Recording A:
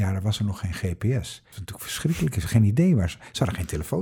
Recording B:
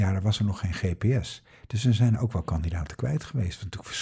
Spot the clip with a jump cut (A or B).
A